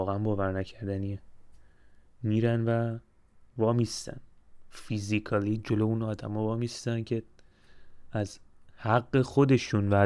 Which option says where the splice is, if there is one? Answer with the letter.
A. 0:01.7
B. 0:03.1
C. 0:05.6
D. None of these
C